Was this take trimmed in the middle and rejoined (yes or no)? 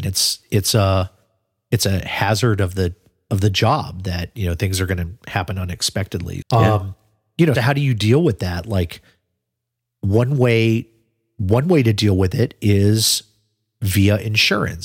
yes